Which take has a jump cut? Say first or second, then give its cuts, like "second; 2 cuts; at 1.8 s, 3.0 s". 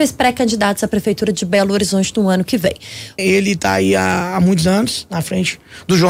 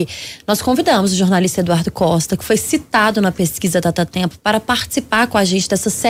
first; 1 cut; at 3.2 s